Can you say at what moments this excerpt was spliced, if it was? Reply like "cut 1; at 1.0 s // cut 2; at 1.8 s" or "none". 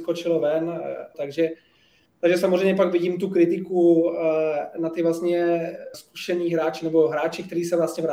cut 1; at 1.1 s // cut 2; at 5.9 s